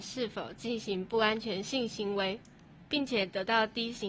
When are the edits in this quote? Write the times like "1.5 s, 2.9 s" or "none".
2.8 s